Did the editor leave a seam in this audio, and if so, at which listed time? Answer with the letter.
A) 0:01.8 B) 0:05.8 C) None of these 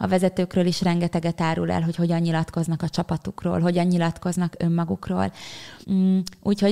B